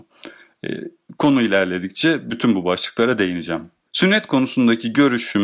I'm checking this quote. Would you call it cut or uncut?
cut